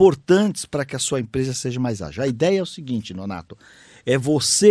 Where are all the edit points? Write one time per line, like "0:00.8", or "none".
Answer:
none

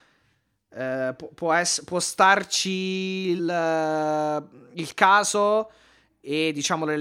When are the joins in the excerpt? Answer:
0:03.4

